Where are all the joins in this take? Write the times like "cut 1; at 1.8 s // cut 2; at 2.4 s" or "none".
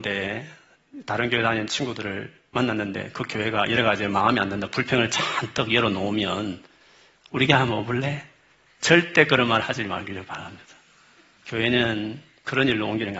none